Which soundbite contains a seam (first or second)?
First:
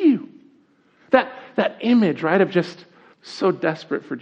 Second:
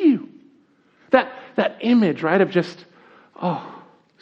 first